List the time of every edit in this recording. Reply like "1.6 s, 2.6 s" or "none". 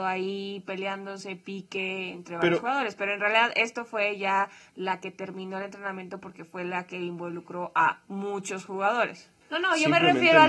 9.4 s